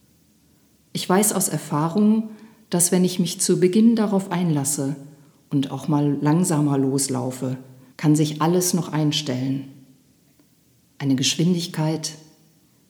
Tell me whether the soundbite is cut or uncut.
cut